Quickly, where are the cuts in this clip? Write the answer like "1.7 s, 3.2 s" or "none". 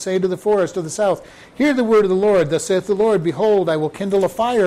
none